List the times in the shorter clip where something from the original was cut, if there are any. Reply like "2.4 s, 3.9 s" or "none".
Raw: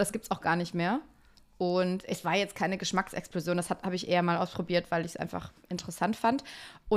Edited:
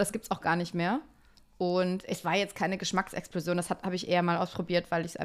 none